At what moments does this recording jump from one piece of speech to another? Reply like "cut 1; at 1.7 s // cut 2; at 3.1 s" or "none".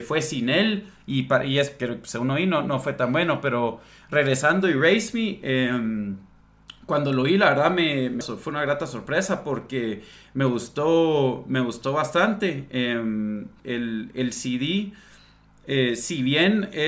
cut 1; at 8.2 s // cut 2; at 13.6 s